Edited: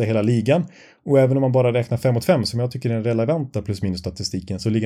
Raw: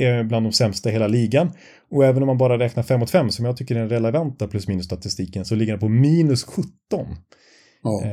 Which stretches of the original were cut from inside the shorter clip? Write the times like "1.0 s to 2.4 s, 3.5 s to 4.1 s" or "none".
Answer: none